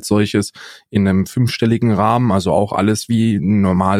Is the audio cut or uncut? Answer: uncut